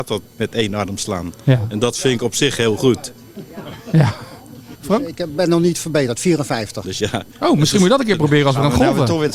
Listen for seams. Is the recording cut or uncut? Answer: cut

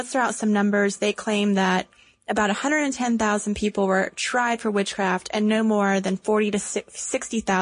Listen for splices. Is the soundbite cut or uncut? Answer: uncut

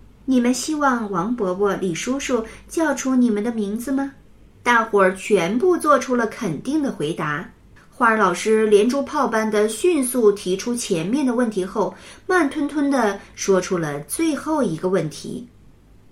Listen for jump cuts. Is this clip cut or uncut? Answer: cut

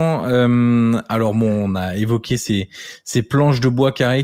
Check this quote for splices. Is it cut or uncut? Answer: uncut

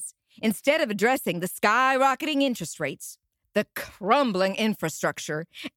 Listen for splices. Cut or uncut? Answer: uncut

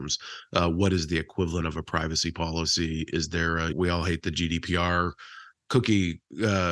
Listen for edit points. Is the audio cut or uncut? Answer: cut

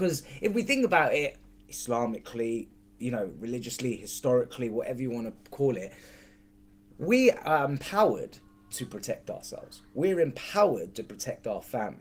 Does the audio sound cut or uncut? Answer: uncut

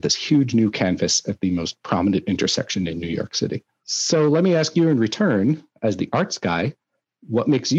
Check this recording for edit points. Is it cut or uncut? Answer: uncut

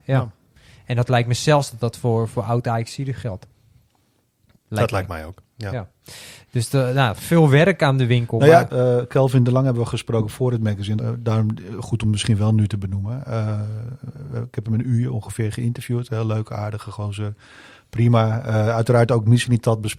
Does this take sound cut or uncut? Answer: cut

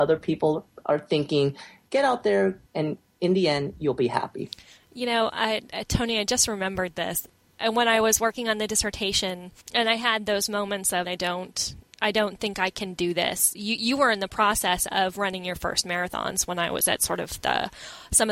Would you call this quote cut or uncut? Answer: cut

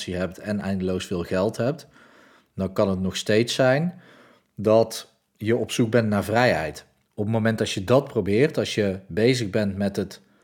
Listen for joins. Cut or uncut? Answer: cut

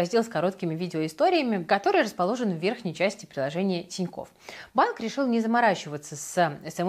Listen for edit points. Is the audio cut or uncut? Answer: cut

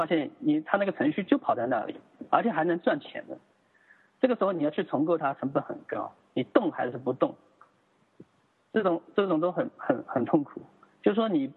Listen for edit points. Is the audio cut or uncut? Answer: cut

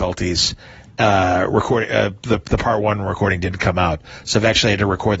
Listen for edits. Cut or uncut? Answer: uncut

